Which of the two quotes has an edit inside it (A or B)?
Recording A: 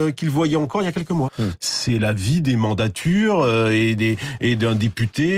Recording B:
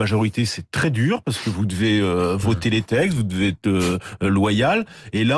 A